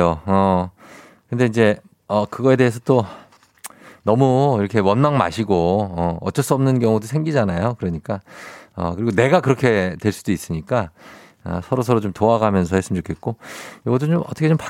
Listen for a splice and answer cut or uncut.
uncut